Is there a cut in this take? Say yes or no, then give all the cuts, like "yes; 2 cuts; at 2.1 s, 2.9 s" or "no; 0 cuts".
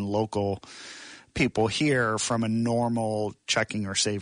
no; 0 cuts